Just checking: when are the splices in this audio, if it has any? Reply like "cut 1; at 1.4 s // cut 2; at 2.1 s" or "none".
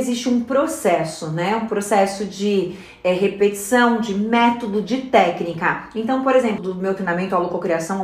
cut 1; at 6.6 s

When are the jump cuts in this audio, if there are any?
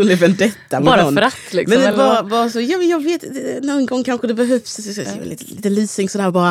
none

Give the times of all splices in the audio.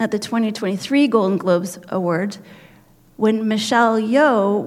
none

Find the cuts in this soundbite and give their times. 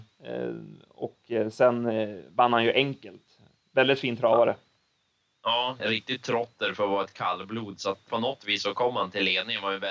cut 1; at 5.8 s // cut 2; at 8.1 s

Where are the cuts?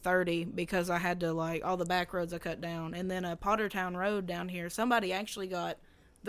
none

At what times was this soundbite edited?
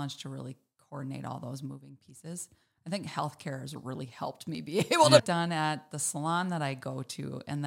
cut 1; at 5.2 s

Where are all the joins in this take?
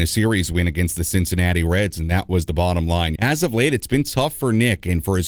cut 1; at 3.2 s

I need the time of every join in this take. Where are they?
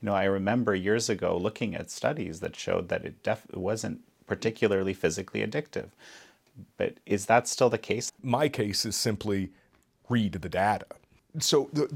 cut 1; at 8.1 s

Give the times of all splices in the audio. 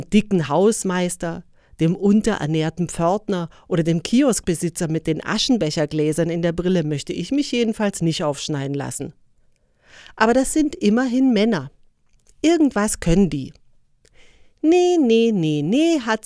none

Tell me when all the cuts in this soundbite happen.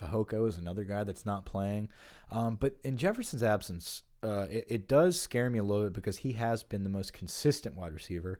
cut 1; at 4.7 s

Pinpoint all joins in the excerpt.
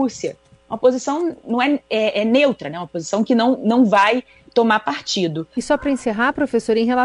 cut 1; at 5.5 s

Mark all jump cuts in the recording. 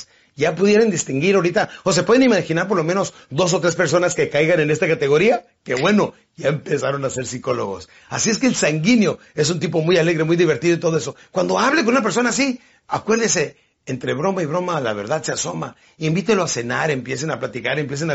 none

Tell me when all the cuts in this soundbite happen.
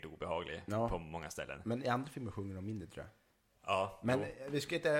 none

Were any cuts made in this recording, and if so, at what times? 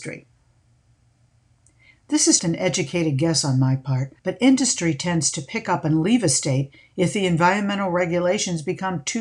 cut 1; at 2.4 s // cut 2; at 4.2 s

